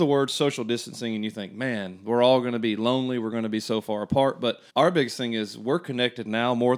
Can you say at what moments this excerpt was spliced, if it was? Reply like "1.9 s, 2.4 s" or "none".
4.7 s